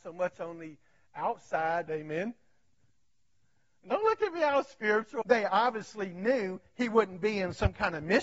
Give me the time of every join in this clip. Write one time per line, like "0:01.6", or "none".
0:01.9
0:05.2